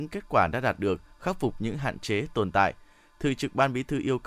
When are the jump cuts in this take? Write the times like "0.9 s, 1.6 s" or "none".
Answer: none